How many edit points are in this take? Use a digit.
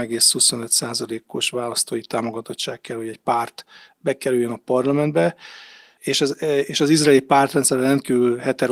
0